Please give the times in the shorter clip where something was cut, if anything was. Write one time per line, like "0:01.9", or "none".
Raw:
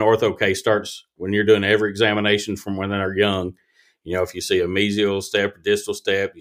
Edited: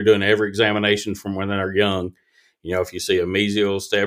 none